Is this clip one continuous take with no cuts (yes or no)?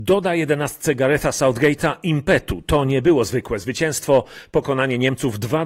yes